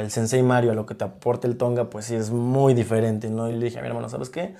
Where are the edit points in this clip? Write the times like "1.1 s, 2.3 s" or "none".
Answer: none

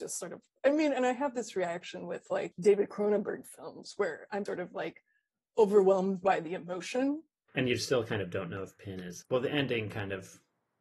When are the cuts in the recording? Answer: 4.5 s, 7.5 s, 9.2 s

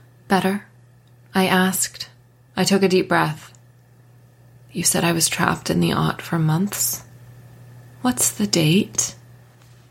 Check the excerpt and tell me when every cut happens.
2.5 s

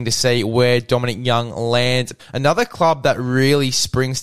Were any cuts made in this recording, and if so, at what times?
2.2 s

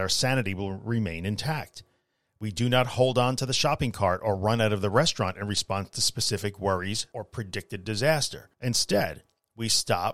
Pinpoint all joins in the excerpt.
7.1 s, 8.5 s

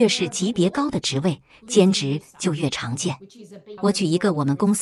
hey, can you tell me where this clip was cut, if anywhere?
3.8 s

